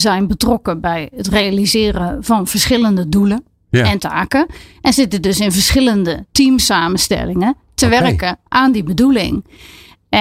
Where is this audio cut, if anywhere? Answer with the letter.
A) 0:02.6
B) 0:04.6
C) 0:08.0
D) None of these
D